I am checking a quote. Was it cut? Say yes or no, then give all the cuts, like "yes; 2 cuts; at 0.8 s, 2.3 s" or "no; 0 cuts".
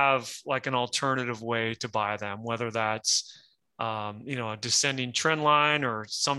no; 0 cuts